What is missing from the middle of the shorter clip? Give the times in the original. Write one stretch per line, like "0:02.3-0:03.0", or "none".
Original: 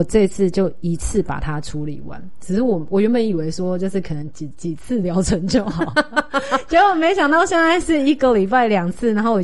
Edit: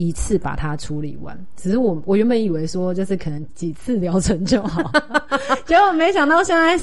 0:04.3-0:04.5

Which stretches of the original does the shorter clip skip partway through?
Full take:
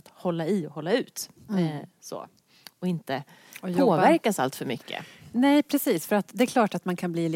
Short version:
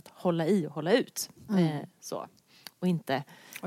none

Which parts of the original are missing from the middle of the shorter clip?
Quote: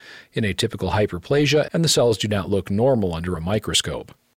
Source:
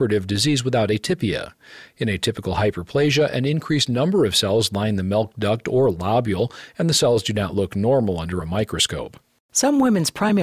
0:03.3-0:06.7

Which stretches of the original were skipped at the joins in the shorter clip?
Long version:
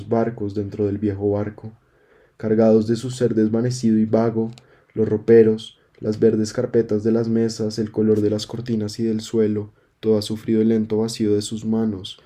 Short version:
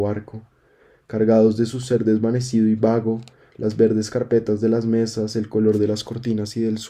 0:04.8-0:05.9

